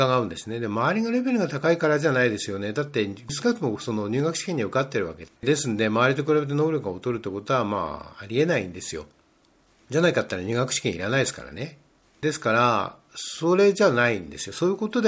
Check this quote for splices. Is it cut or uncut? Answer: cut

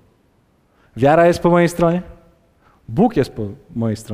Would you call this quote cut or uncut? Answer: uncut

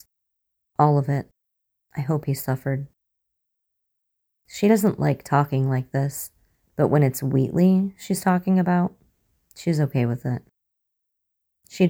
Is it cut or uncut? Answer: uncut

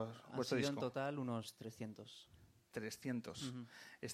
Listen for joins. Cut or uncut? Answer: uncut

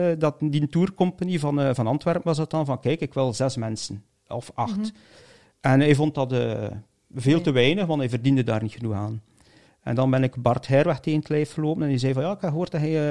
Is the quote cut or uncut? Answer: uncut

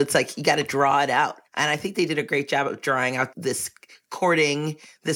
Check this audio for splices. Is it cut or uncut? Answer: cut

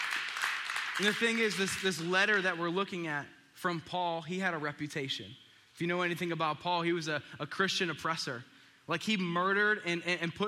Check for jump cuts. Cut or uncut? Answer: uncut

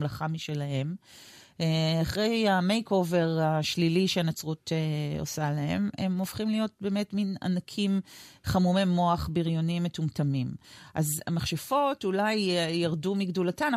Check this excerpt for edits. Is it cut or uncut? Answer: uncut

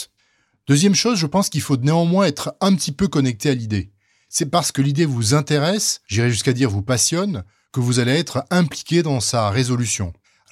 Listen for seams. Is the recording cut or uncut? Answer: uncut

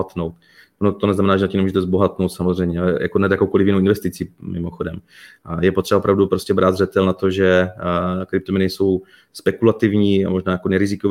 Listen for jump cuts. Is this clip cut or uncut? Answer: uncut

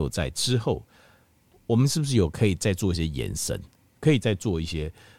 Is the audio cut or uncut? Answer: uncut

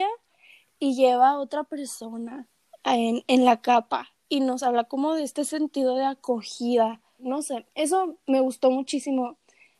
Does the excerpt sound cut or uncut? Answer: cut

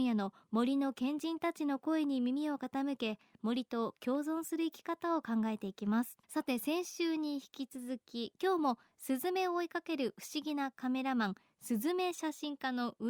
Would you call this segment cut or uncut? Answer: cut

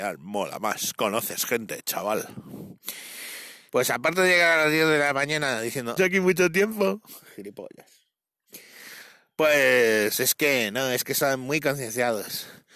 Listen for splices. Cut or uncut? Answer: cut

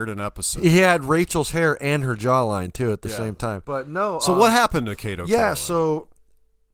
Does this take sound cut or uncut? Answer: cut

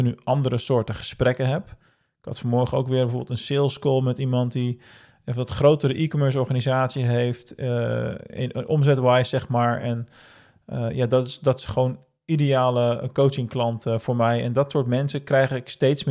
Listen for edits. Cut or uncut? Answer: uncut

